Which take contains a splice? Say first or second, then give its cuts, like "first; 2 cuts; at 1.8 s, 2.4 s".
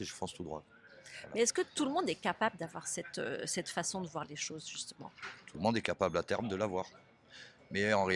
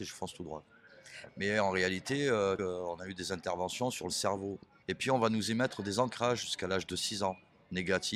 second; 3 cuts; at 1.3 s, 2.6 s, 4.8 s